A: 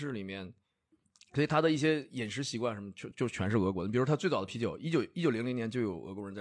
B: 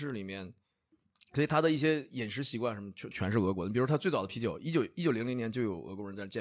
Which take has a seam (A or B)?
B